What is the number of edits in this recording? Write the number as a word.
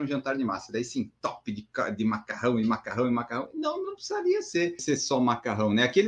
one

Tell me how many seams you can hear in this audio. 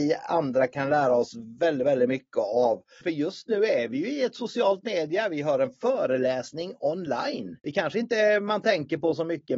two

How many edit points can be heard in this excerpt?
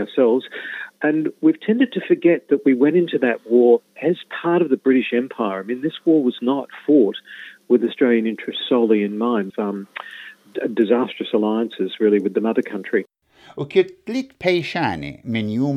one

